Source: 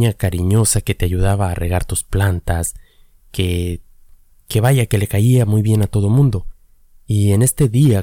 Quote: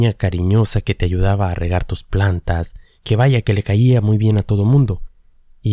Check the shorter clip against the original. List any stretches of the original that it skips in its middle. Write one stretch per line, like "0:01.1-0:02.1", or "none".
0:03.0-0:04.4